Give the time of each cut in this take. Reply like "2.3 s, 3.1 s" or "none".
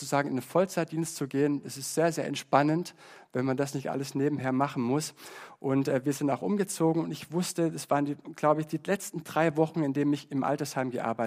none